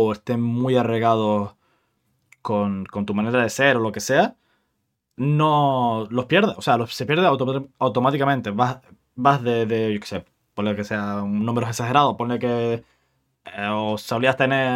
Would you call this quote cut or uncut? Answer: uncut